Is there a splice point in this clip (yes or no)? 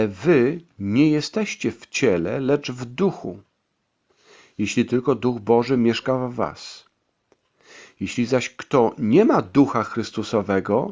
no